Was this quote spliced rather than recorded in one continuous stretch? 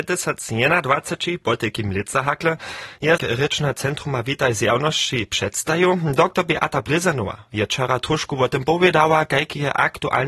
yes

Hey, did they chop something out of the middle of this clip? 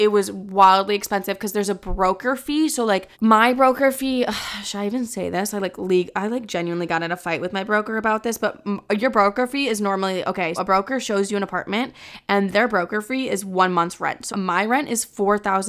yes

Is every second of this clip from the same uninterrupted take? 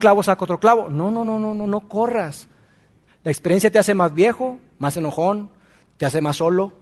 no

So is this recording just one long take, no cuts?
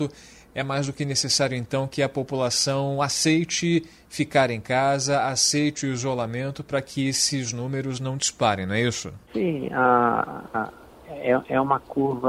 no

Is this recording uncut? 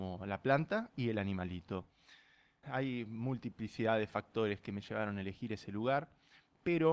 no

